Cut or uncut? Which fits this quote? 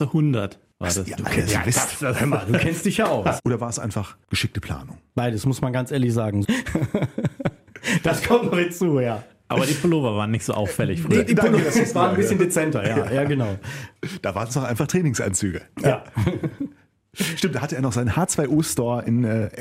cut